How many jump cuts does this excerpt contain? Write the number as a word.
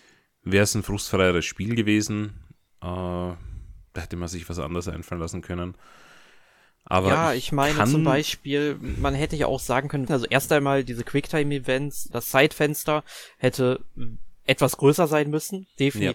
two